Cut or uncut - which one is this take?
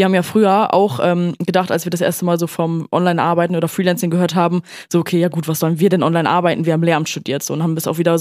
uncut